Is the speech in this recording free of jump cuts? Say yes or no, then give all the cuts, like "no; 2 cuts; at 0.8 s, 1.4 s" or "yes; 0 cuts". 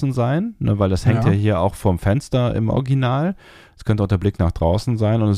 yes; 0 cuts